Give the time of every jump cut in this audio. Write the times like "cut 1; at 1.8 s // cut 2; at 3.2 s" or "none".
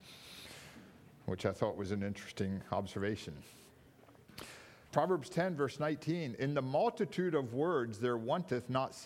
cut 1; at 4.9 s